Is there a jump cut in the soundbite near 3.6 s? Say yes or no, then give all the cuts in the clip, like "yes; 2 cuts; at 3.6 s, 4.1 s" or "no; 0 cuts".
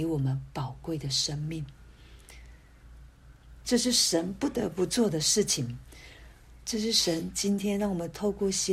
yes; 2 cuts; at 3.6 s, 6.6 s